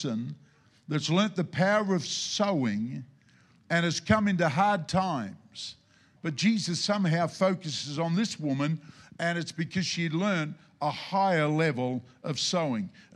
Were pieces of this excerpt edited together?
yes; 1 cut; at 6.2 s

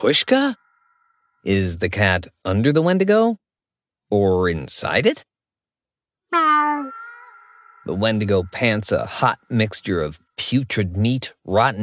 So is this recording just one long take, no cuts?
yes; 0 cuts

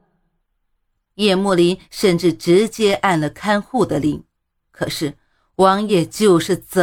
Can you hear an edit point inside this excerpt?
yes; 2 cuts; at 1.1 s, 5.9 s

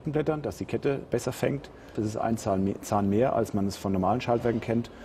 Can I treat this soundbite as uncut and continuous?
no; 1 cut; at 2.0 s

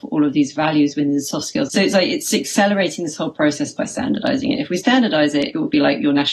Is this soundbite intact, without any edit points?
no; 1 cut; at 1.7 s

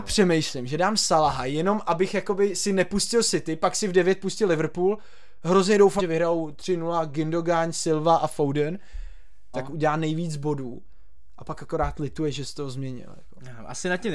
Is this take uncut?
no; 2 cuts; at 6.0 s, 9.5 s

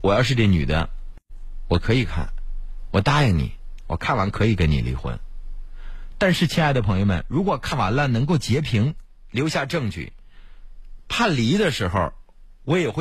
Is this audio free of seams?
yes; 0 cuts

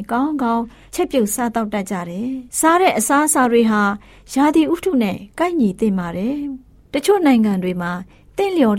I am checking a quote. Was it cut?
yes; 1 cut; at 2.5 s

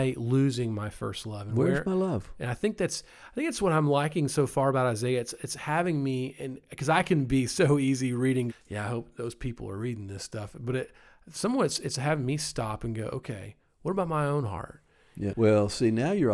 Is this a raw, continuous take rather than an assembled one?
no; 2 cuts; at 8.5 s, 15.3 s

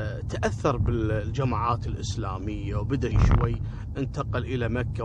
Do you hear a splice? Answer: yes; 1 cut; at 3.1 s

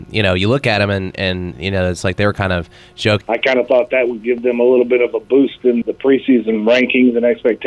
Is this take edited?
yes; 2 cuts; at 3.2 s, 5.8 s

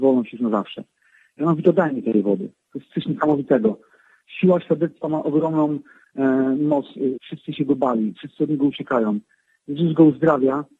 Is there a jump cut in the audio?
yes; 2 cuts; at 2.6 s, 7.1 s

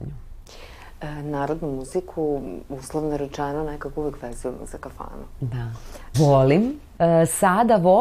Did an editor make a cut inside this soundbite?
yes; 1 cut; at 6.1 s

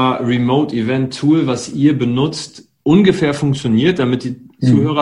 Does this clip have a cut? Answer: no; 0 cuts

